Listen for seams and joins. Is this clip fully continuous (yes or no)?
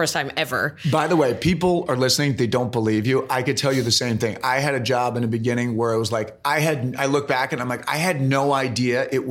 yes